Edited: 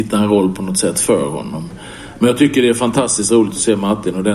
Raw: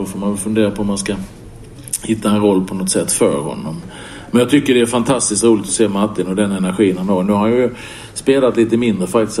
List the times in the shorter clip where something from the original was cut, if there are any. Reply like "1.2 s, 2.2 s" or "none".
none

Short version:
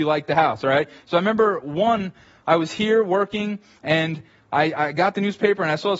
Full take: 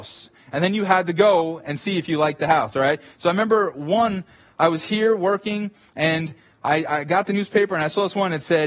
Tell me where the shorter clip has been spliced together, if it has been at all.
none

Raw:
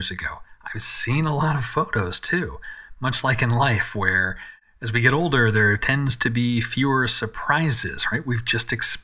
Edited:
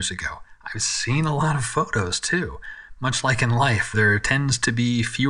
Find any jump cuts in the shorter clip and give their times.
3.9 s

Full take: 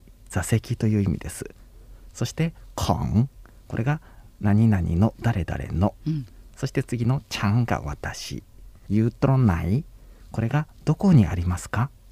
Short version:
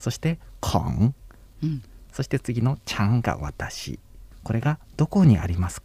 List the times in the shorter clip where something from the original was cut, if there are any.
1.5 s, 4.3 s

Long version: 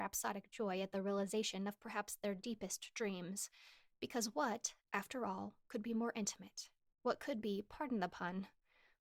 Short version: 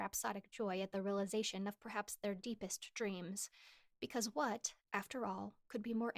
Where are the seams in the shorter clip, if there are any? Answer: none

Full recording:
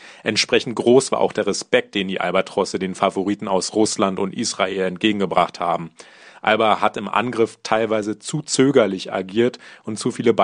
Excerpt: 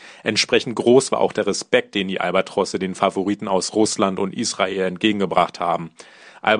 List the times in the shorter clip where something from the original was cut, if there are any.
none

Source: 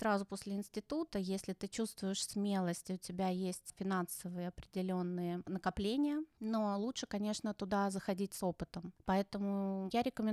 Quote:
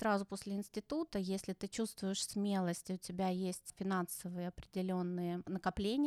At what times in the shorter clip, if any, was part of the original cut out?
none

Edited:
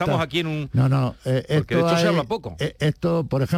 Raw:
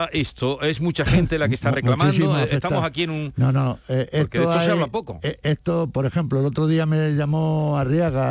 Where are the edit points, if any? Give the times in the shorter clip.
none

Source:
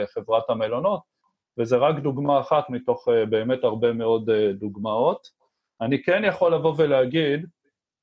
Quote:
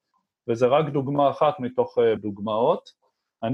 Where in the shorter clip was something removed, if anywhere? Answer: 2.2 s

